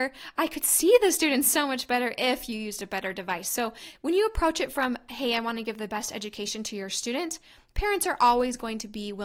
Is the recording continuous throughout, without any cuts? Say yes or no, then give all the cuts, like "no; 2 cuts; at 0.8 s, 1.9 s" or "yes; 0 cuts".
yes; 0 cuts